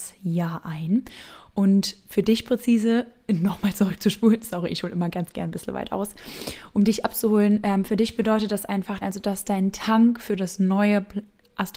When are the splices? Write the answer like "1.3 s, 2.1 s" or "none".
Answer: 9.0 s

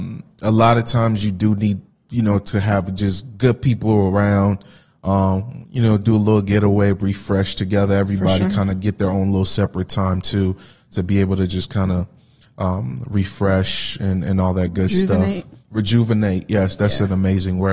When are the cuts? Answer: none

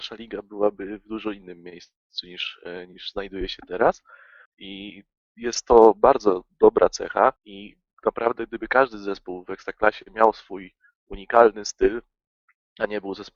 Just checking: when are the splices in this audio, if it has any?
4.5 s, 7.4 s

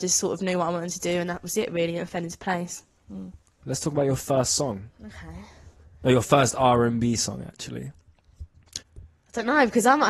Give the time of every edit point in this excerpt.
3.6 s, 8.8 s

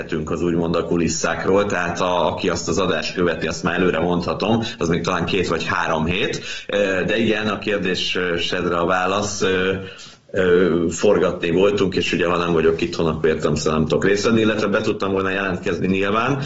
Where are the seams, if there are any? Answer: none

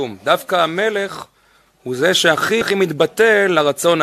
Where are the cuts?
2.6 s

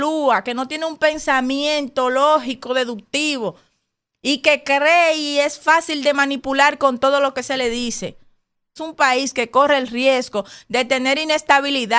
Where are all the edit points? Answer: 8.8 s

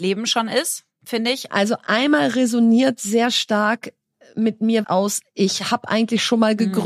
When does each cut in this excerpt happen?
1.5 s, 4.8 s

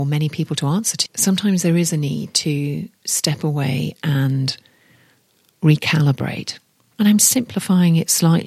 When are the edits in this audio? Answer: 1.1 s, 6.9 s

